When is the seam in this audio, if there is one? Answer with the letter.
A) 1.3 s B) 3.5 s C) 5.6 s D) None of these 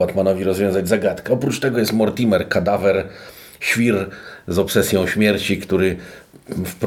D